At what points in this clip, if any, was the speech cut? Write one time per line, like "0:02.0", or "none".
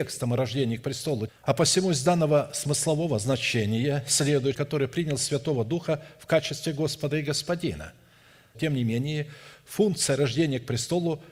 0:01.3
0:04.5
0:08.5